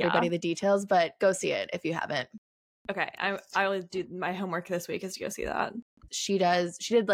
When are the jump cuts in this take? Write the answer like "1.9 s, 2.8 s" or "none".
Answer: 6.1 s